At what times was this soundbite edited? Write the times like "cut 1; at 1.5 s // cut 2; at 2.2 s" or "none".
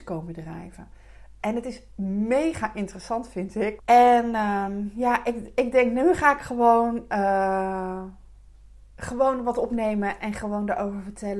cut 1; at 3.8 s